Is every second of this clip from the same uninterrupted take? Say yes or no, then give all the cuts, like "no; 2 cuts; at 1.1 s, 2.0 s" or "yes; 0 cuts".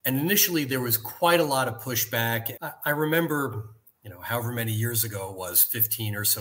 no; 1 cut; at 2.5 s